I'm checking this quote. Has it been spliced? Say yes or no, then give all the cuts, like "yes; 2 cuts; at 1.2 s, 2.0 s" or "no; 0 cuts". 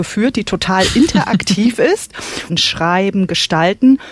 yes; 1 cut; at 2.5 s